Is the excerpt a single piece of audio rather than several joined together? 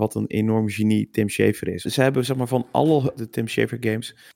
no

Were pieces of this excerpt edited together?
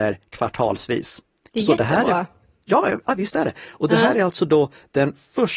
yes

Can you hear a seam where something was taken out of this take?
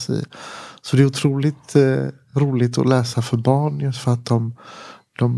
no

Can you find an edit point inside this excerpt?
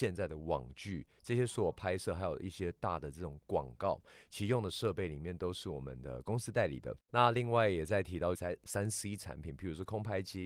yes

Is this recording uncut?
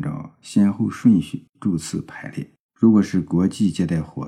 no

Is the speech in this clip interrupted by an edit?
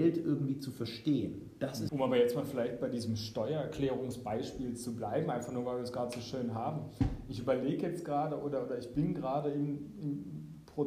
yes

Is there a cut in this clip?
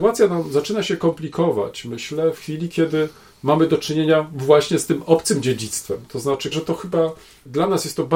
yes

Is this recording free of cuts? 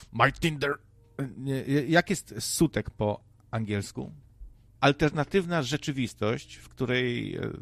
no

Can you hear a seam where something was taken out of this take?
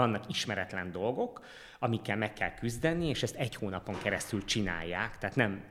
no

